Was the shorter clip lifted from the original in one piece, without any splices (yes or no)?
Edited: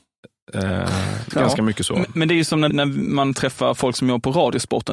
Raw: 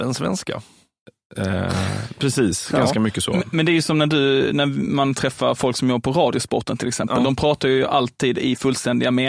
no